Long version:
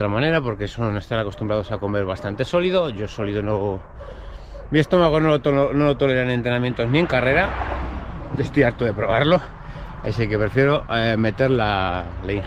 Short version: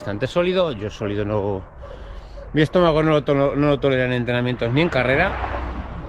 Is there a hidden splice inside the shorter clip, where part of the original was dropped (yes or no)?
no